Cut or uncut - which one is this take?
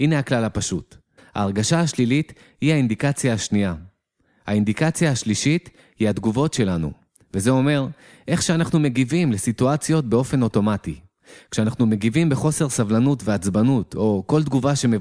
cut